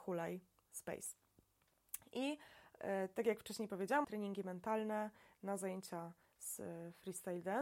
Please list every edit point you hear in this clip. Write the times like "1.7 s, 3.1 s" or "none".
4.0 s